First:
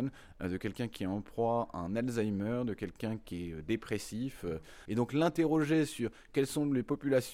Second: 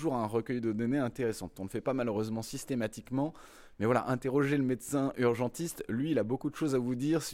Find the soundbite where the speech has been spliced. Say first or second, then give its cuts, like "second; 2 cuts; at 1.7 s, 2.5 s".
first; 1 cut; at 4.9 s